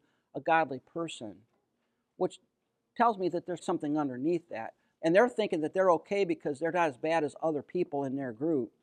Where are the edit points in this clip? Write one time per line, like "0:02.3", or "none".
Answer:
0:03.6
0:05.0